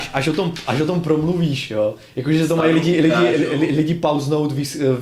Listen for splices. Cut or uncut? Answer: uncut